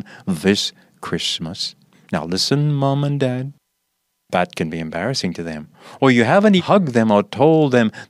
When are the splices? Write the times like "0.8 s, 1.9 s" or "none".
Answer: 1.9 s, 4.2 s, 6.6 s